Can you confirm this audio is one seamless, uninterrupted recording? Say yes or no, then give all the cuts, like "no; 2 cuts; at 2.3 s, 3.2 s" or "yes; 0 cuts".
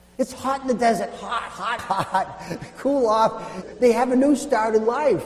no; 2 cuts; at 1.8 s, 3.6 s